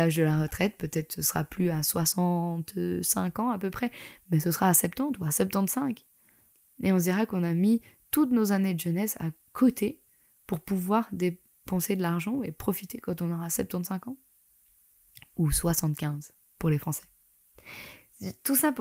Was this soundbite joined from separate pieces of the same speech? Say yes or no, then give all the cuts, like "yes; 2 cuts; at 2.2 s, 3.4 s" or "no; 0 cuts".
no; 0 cuts